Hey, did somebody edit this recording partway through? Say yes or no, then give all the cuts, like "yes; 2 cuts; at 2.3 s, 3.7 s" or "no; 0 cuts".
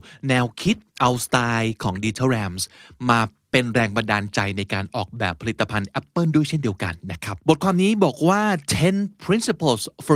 yes; 1 cut; at 7.4 s